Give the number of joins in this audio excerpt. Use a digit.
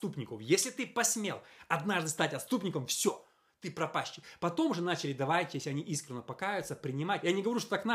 0